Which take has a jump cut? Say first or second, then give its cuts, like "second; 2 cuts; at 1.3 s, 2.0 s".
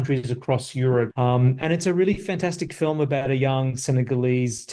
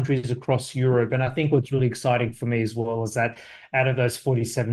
first; 1 cut; at 1.1 s